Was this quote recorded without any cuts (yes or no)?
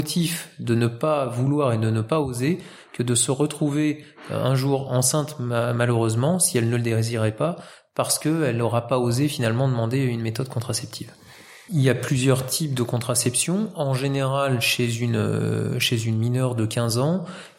yes